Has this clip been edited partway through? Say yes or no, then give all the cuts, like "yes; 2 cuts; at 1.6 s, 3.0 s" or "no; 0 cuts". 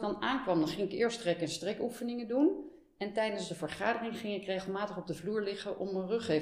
no; 0 cuts